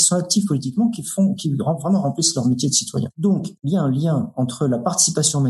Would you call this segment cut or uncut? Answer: uncut